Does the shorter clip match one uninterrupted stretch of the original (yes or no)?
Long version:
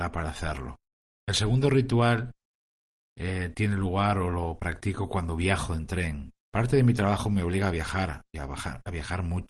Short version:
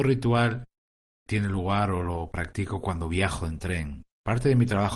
no